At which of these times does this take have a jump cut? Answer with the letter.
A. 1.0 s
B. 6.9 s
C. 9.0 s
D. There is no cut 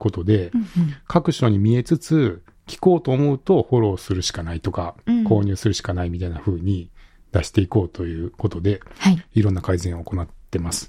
D